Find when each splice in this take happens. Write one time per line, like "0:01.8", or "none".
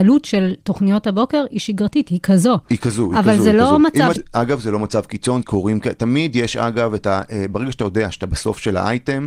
0:04.2
0:05.4